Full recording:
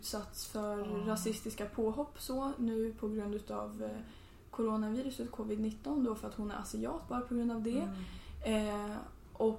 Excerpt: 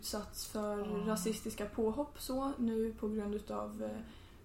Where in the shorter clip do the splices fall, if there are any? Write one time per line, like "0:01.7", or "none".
none